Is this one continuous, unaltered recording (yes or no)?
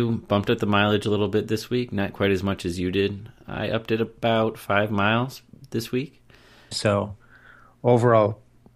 no